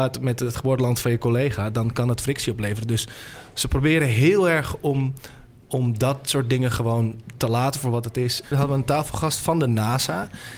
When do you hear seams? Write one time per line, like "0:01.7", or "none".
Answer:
0:08.4